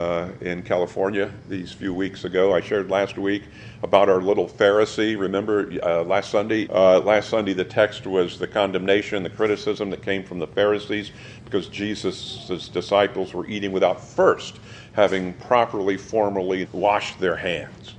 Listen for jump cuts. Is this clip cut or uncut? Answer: cut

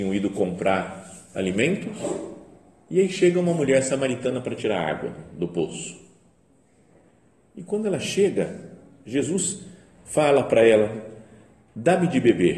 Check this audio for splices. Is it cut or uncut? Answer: uncut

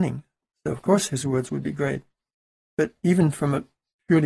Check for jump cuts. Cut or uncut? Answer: uncut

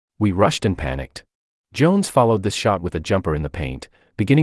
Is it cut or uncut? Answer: cut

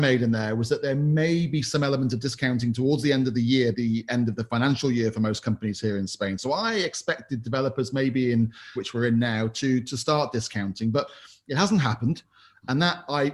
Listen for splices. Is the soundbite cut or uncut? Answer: cut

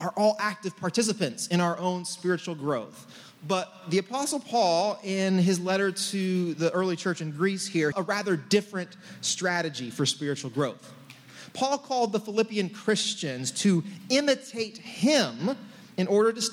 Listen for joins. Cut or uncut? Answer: cut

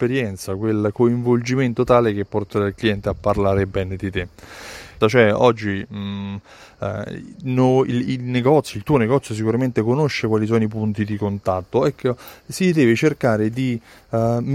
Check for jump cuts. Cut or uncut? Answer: cut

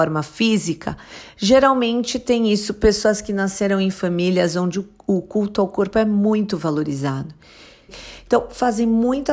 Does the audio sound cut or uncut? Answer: cut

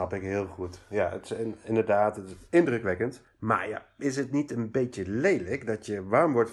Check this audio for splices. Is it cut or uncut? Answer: uncut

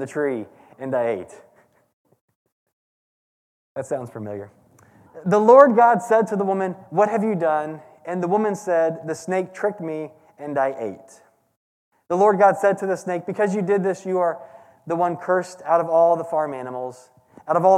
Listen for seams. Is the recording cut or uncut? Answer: uncut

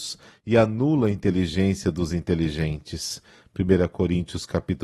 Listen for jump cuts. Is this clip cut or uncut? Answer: uncut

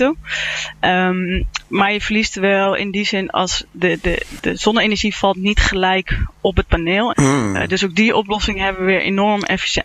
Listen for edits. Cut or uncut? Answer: cut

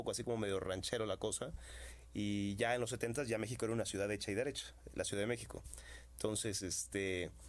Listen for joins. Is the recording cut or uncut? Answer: uncut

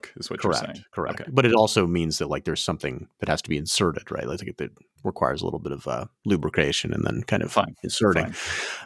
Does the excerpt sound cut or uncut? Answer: uncut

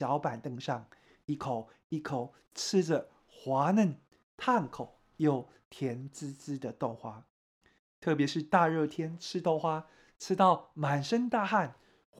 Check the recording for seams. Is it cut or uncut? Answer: uncut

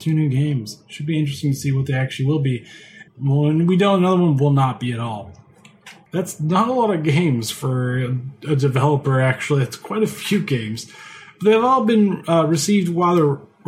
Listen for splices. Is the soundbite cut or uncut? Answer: cut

